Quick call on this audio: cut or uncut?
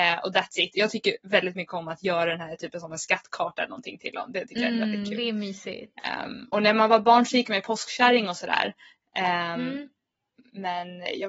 uncut